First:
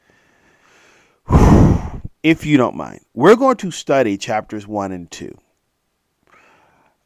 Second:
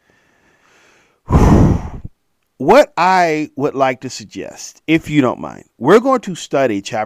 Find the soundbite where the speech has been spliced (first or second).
first